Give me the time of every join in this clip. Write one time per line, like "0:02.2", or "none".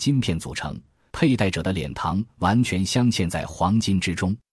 0:01.1

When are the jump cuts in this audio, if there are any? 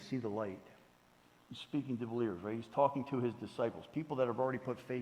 0:01.4

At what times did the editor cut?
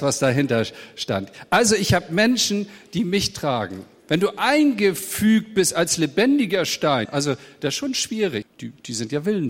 0:07.1
0:08.4

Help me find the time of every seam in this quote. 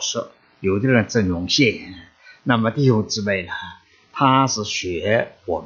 none

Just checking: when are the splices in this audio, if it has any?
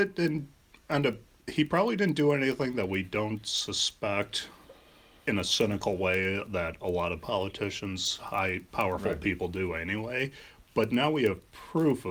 none

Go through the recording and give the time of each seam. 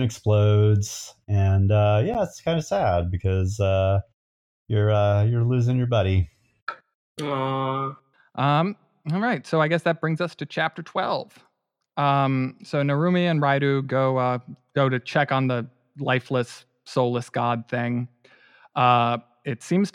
none

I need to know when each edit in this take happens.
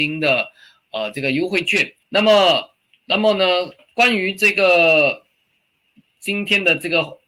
0:02.0

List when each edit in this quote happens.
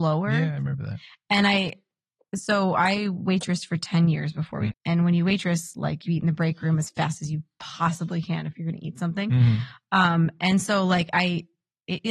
0:04.7

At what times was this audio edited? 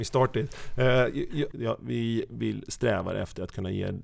0:01.5

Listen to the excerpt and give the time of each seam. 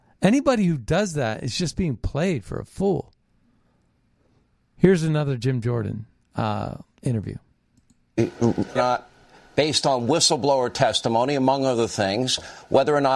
0:08.8

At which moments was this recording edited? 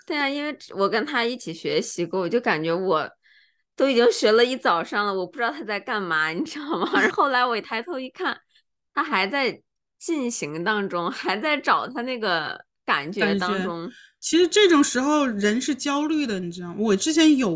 0:07.1

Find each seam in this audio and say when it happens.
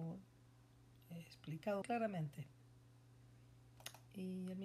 0:01.8

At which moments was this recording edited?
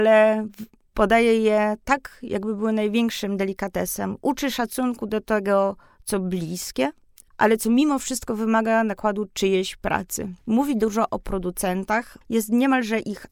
0:07.3
0:10.4
0:12.2

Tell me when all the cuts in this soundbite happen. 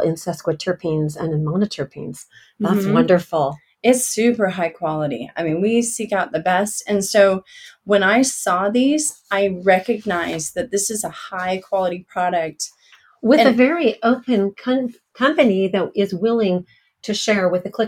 none

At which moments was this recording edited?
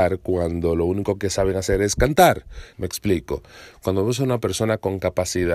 0:02.7

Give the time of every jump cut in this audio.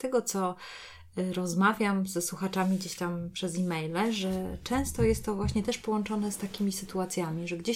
none

